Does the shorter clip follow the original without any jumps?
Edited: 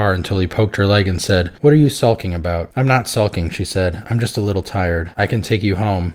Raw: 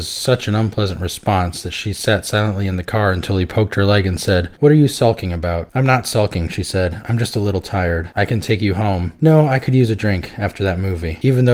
yes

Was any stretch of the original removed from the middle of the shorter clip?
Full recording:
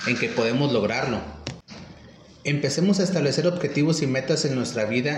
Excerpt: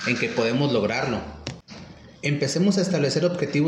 yes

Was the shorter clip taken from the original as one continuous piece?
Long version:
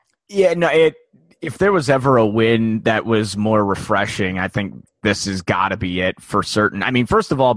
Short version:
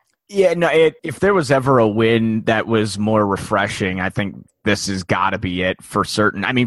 no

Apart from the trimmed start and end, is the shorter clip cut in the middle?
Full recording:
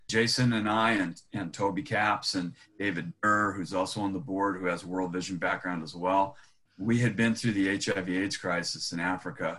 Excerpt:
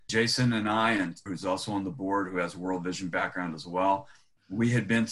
yes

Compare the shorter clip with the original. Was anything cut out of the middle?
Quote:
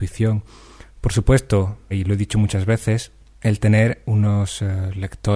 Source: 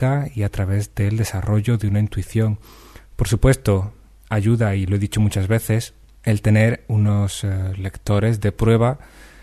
yes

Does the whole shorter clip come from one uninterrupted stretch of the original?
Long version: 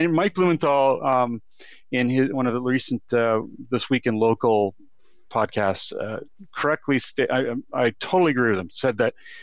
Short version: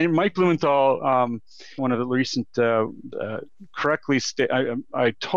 no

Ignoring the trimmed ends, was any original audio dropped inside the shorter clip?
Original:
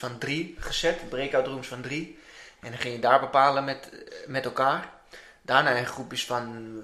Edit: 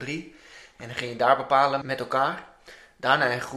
yes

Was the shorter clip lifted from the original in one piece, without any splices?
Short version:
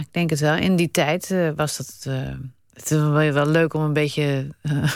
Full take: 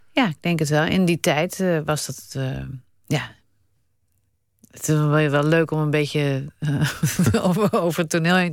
no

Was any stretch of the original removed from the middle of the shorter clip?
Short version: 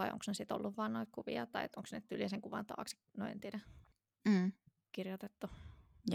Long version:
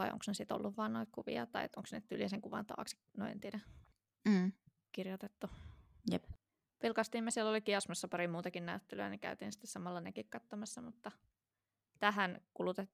no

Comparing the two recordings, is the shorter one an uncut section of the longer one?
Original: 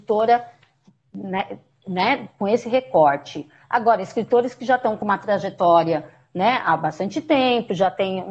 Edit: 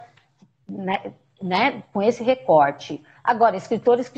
yes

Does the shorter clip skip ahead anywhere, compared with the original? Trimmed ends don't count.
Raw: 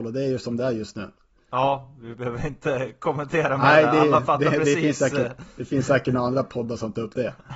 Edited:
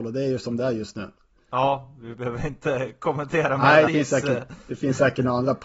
yes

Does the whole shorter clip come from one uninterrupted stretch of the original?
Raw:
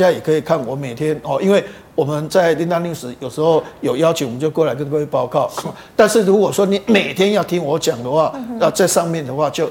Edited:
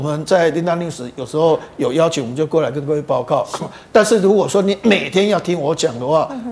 yes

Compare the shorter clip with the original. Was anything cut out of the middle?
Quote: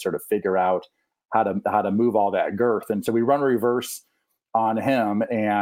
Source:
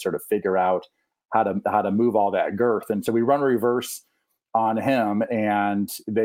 no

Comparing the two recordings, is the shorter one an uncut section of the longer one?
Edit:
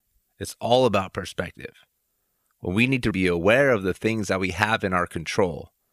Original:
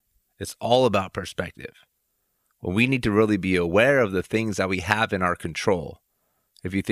no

